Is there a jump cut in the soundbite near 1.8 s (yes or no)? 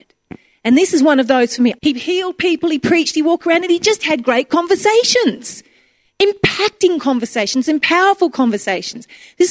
yes